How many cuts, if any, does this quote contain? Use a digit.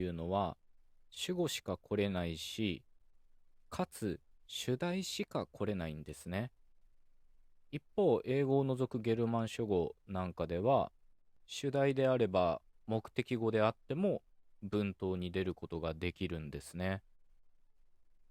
0